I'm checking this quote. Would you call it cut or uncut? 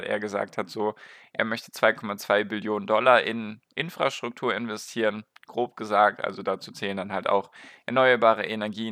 uncut